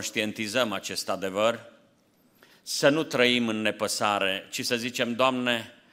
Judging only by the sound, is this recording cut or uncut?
uncut